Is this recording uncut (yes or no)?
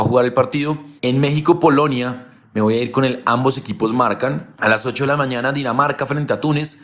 no